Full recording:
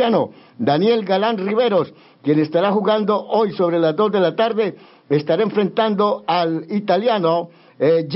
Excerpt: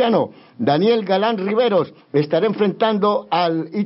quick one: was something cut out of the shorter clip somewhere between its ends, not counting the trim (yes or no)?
yes